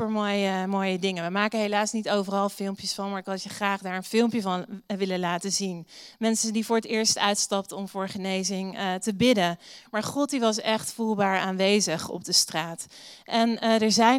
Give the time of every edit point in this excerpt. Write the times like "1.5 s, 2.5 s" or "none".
none